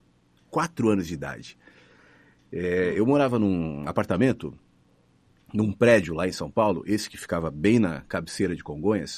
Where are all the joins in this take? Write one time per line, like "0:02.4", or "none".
none